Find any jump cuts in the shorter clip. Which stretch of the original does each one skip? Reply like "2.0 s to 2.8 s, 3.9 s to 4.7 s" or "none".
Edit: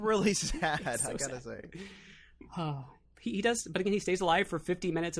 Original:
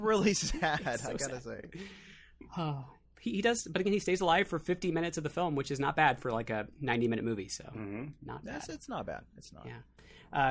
none